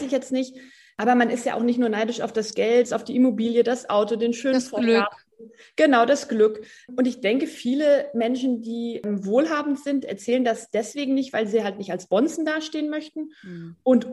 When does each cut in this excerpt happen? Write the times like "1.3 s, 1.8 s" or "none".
2.8 s